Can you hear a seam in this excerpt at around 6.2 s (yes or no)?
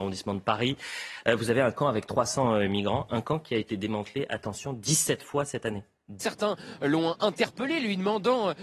yes